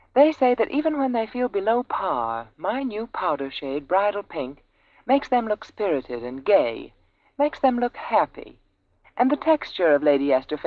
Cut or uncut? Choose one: cut